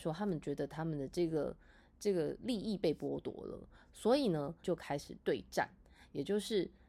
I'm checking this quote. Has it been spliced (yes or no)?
yes